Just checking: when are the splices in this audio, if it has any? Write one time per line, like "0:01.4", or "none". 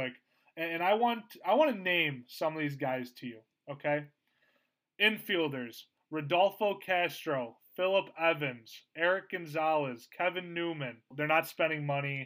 0:11.1